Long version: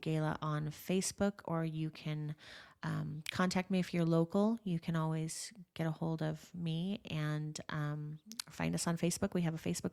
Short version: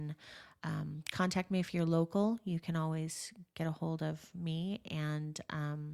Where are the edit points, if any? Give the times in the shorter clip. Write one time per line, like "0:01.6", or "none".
none